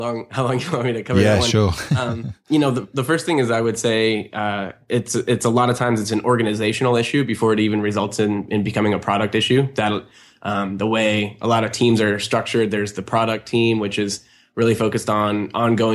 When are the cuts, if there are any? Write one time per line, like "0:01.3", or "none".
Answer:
none